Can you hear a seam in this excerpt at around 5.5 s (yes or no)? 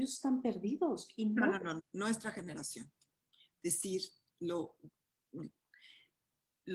no